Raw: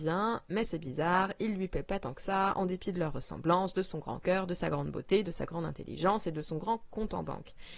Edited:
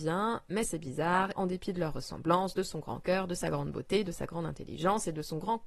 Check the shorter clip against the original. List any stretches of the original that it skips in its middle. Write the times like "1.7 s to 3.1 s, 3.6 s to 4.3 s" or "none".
1.4 s to 2.6 s